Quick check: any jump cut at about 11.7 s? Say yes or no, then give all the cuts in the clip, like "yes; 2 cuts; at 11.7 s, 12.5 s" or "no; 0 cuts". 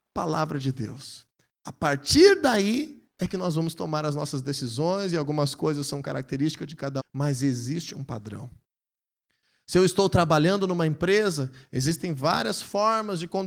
no; 1 cut; at 7.0 s